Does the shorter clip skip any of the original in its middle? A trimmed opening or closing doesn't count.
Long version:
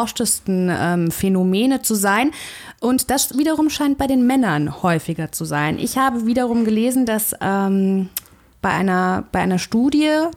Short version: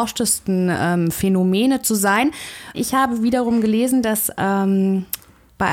yes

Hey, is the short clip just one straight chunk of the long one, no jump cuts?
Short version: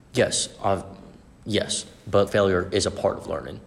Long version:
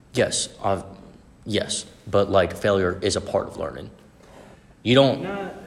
no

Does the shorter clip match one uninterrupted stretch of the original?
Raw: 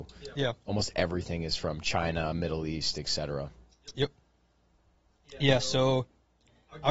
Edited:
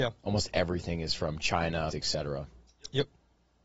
no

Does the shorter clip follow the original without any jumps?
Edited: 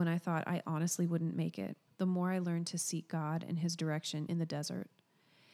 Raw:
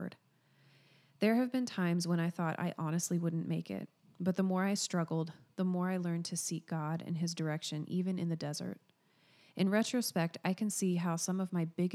no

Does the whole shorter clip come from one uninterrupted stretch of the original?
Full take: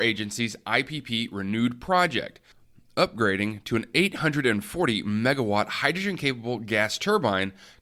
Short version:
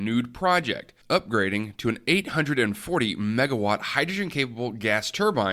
no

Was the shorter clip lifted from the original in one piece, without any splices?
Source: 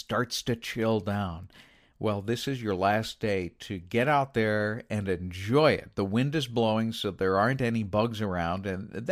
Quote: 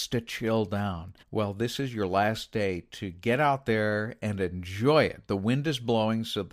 no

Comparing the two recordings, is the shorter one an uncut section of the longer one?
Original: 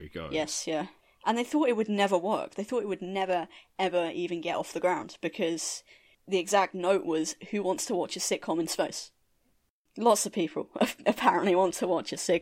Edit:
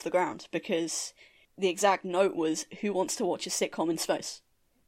yes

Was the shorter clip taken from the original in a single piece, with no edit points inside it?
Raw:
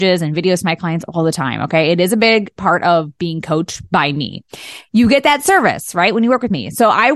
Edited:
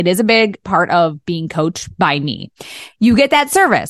yes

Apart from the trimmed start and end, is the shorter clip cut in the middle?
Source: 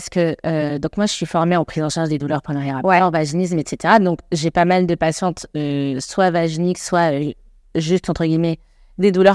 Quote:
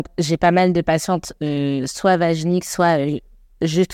no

